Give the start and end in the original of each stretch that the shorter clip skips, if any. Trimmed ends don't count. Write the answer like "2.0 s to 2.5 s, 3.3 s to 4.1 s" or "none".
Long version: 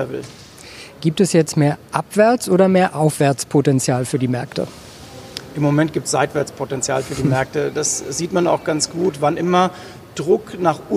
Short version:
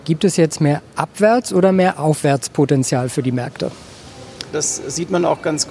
5.5 s to 7.7 s